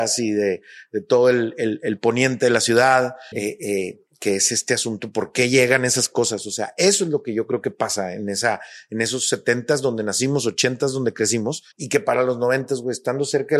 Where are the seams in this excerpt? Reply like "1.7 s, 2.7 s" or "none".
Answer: 3.3 s, 11.7 s